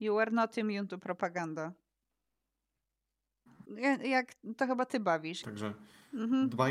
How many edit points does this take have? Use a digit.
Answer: 2